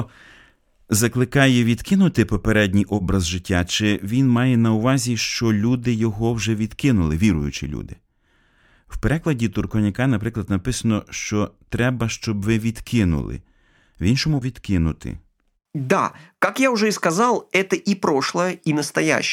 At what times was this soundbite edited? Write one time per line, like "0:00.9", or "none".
0:14.4